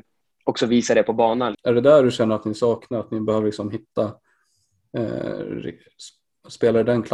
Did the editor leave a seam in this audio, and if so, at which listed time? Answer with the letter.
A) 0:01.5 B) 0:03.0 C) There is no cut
A